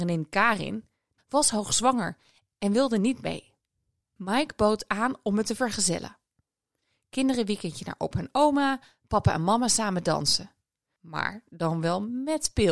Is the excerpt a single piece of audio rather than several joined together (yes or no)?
no